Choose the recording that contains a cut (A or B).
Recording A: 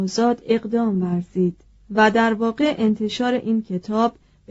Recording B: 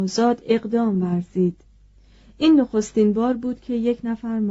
A